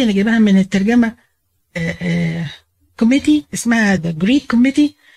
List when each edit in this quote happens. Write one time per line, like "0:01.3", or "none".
0:04.0